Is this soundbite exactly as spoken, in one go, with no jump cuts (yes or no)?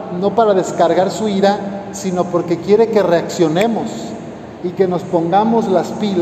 yes